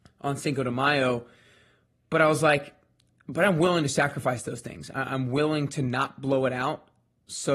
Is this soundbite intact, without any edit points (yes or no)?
yes